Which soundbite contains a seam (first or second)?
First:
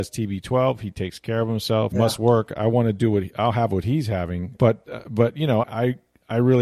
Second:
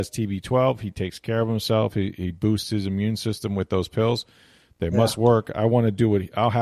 first